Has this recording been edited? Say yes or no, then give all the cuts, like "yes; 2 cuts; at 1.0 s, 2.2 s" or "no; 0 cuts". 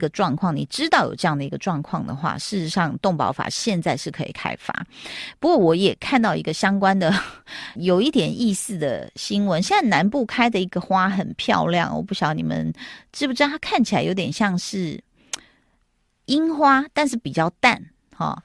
yes; 1 cut; at 7.8 s